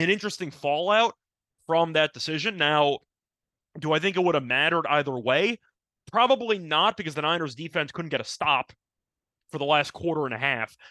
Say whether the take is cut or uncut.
uncut